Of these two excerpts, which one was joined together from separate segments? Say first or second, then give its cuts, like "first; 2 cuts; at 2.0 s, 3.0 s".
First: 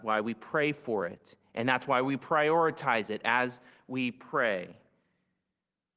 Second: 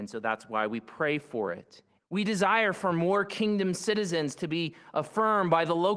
second; 1 cut; at 2.0 s